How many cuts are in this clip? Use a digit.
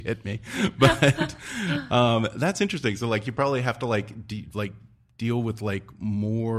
0